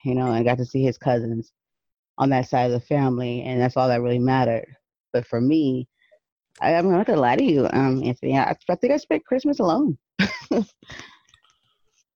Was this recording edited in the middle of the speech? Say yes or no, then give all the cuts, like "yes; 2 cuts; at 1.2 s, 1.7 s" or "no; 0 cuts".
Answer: no; 0 cuts